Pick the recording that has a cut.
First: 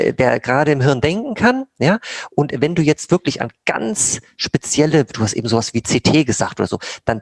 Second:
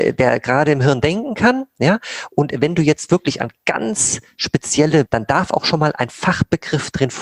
second; 1 cut; at 5.1 s

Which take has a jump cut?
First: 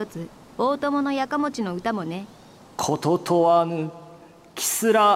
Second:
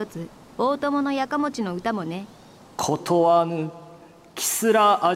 second; 1 cut; at 3.0 s

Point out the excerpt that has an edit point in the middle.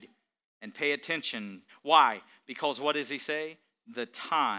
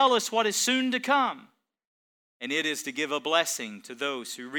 first; 1 cut; at 1.7 s

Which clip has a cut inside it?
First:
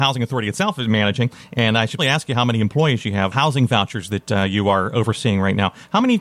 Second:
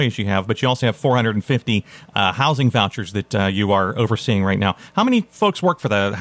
first; 2 cuts; at 2.0 s, 3.3 s

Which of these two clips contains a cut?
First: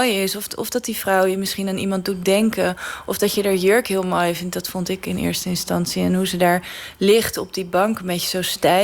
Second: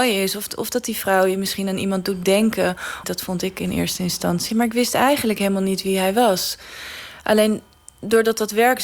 second; 2 cuts; at 3.0 s, 4.5 s

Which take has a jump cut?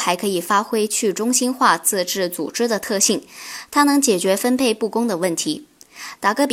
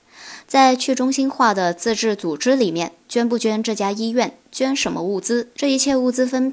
second; 1 cut; at 5.6 s

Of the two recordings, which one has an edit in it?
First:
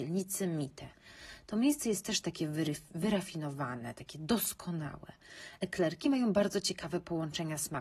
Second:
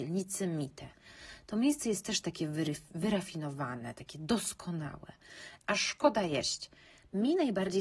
second; 1 cut; at 5.6 s

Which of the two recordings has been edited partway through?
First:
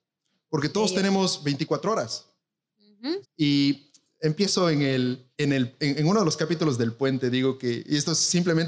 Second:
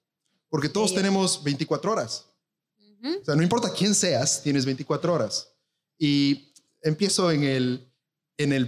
first; 2 cuts; at 3.2 s, 5.3 s

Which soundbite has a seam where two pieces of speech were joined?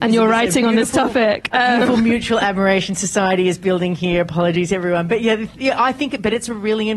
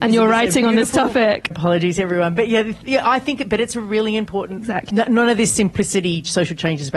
second; 2 cuts; at 1.5 s, 4.9 s

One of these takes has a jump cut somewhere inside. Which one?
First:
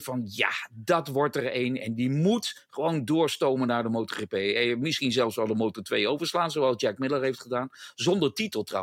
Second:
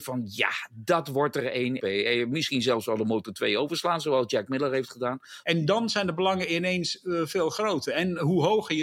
second; 2 cuts; at 1.8 s, 5.4 s

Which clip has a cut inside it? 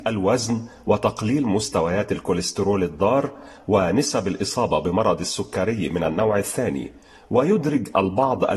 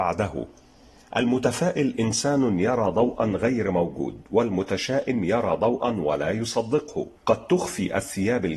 second; 1 cut; at 7.2 s

